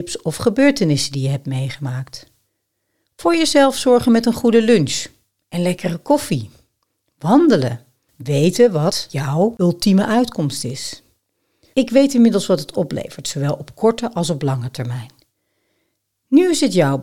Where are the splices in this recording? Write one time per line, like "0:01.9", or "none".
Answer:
0:08.1
0:11.7

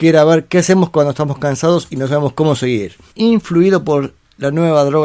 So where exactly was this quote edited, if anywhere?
0:03.1

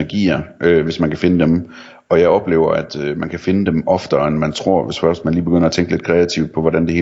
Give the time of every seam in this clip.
none

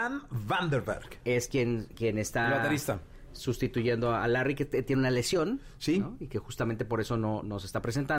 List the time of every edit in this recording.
none

